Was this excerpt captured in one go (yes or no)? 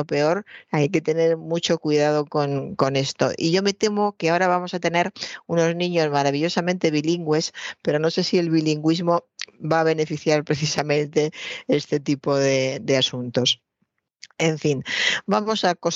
yes